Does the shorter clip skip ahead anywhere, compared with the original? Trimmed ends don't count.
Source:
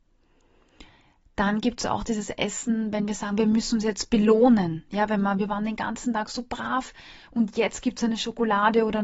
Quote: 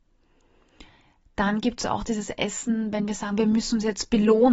no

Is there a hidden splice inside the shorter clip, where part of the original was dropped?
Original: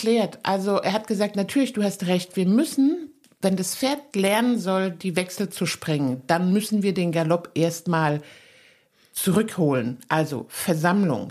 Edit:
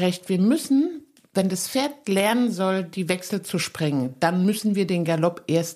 no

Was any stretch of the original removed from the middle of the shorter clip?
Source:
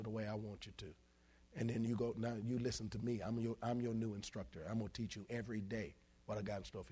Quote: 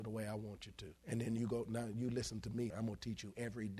yes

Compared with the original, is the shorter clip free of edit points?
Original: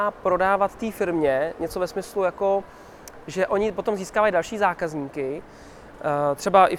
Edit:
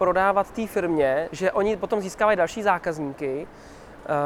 no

